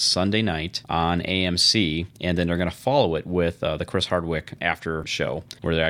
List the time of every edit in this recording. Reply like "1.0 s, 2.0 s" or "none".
none